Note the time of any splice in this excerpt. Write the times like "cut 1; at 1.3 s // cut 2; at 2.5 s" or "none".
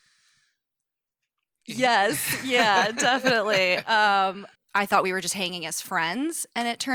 cut 1; at 4.6 s